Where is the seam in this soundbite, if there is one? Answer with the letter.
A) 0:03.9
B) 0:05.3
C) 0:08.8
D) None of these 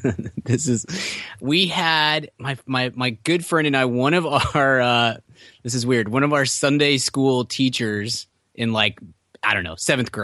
D